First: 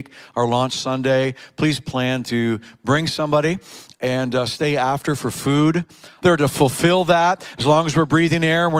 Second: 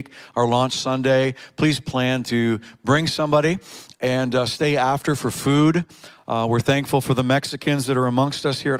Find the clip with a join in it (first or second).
first